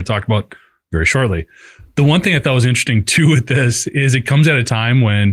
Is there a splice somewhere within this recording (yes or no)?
no